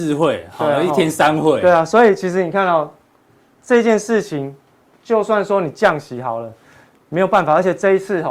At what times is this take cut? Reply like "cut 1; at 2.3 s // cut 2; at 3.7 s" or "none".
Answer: none